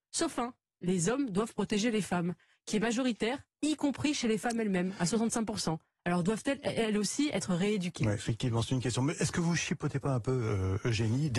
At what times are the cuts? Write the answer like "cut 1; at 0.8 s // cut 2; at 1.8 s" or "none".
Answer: none